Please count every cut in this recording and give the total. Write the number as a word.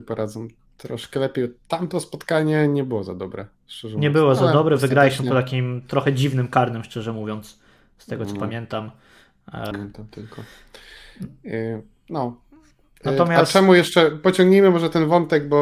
one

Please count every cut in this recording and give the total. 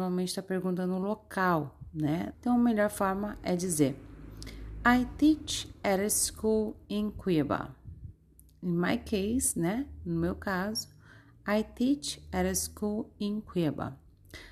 one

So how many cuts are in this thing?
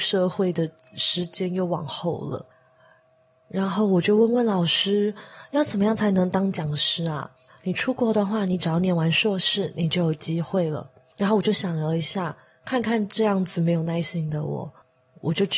one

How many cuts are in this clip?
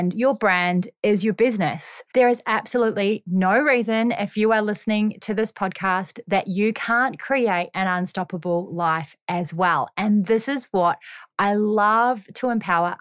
one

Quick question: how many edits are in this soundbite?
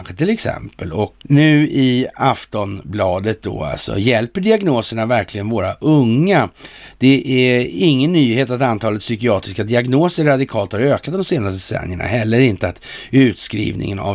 one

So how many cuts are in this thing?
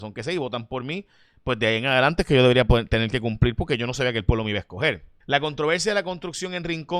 one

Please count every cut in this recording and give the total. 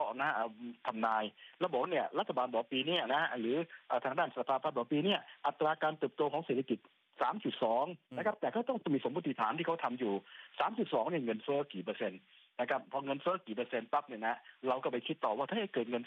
one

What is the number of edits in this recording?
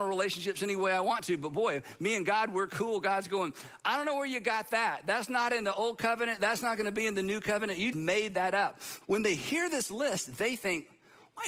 two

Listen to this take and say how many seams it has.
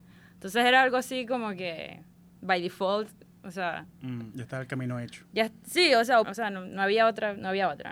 two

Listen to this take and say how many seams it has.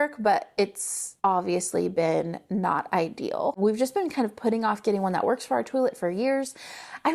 one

